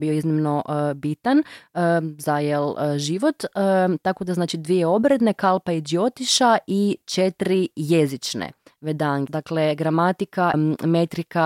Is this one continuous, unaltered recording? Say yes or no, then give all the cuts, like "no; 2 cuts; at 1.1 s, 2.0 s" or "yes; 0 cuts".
no; 2 cuts; at 9.3 s, 10.5 s